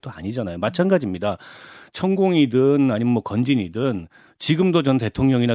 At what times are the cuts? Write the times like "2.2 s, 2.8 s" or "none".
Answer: none